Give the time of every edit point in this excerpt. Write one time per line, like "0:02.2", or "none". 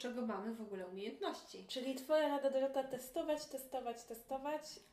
none